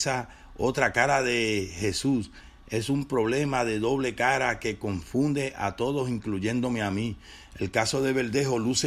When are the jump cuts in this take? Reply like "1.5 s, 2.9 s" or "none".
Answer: none